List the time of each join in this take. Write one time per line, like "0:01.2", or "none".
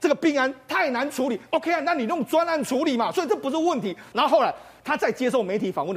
0:04.1